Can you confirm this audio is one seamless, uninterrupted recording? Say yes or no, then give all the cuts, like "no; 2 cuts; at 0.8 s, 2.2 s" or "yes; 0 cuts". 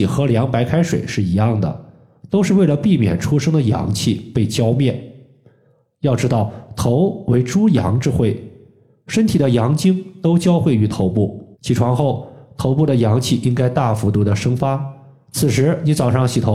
no; 1 cut; at 11.5 s